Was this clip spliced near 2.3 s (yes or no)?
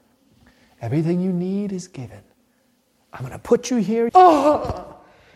no